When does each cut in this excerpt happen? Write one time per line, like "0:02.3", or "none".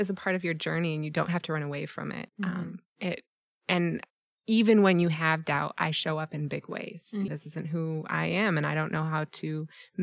0:07.3